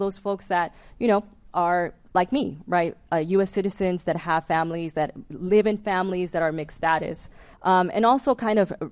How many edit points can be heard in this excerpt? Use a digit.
1